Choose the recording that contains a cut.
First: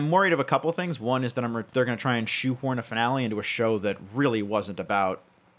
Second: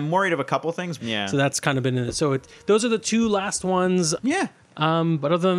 second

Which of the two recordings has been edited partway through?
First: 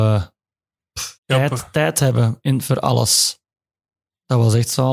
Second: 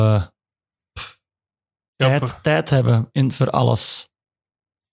first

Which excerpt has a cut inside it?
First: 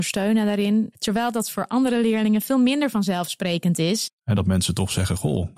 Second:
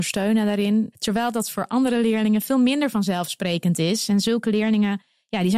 first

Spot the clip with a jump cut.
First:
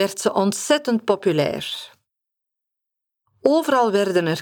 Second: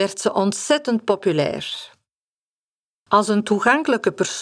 second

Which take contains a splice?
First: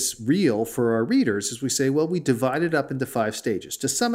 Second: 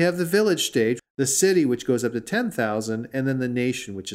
second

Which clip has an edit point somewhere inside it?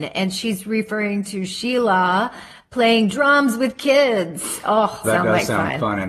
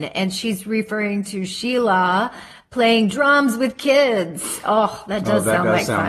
first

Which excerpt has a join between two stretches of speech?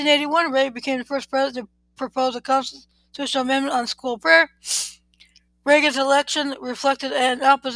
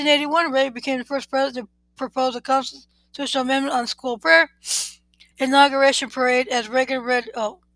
second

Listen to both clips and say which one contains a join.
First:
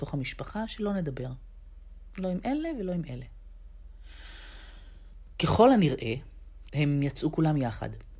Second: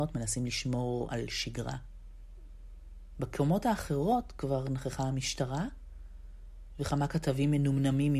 first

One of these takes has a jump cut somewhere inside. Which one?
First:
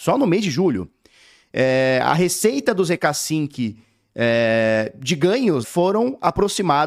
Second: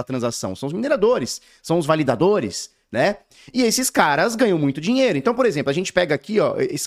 first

